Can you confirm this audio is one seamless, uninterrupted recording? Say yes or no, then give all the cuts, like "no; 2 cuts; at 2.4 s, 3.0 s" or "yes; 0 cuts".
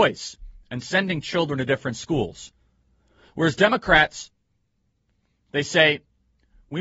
yes; 0 cuts